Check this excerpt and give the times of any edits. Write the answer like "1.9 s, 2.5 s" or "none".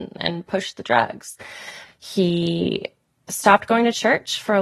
1.8 s

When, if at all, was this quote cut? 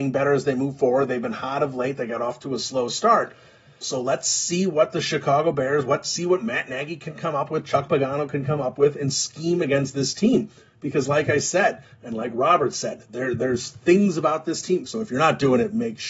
3.8 s, 14.9 s

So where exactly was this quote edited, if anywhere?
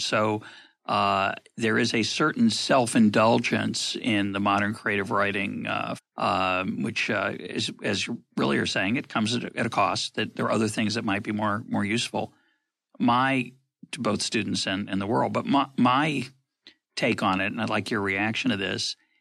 6.0 s

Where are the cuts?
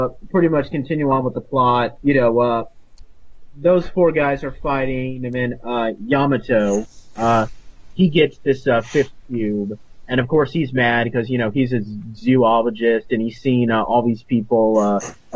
2.0 s

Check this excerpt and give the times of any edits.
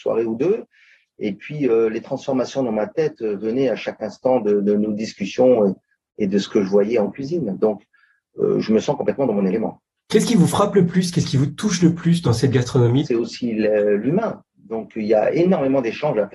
1.1 s, 13.0 s

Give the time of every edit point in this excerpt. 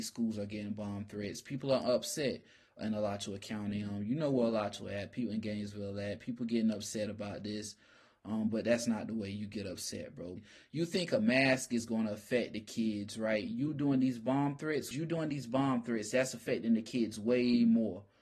10.4 s, 14.9 s

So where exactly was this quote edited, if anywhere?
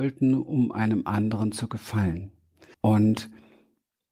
2.7 s

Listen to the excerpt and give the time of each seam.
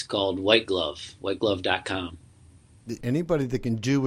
3.0 s

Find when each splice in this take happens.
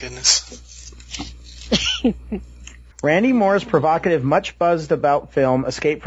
2.9 s

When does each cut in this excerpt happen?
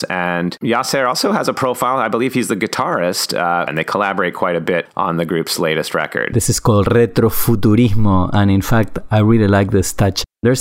3.7 s, 6.3 s

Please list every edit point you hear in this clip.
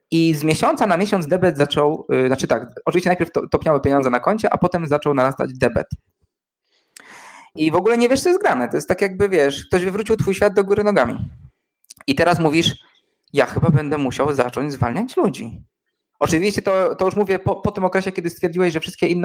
7.6 s

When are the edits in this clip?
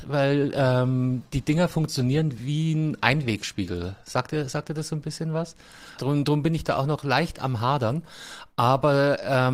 6.0 s

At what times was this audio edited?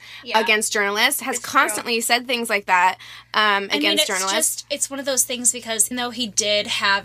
5.9 s

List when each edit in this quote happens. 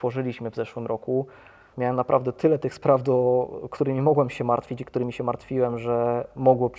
1.7 s

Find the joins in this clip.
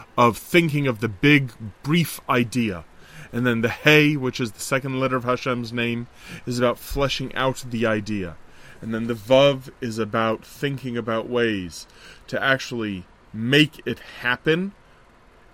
none

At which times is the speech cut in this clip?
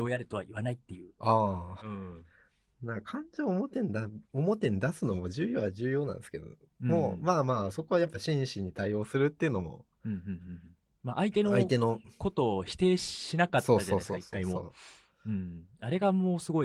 1.8 s, 4.2 s

